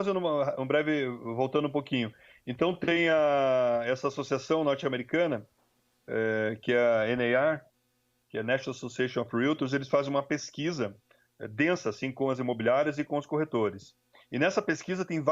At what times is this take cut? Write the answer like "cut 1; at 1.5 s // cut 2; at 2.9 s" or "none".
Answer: none